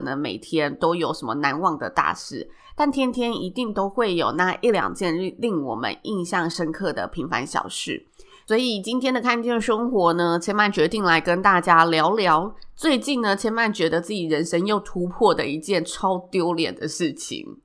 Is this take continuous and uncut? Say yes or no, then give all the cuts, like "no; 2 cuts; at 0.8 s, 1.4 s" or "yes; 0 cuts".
yes; 0 cuts